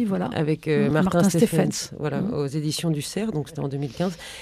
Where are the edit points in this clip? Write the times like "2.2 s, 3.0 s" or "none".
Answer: none